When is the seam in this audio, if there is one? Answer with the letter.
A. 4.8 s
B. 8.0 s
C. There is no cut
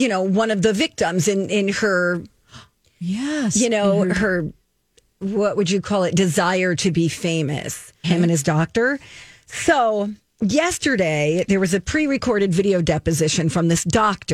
B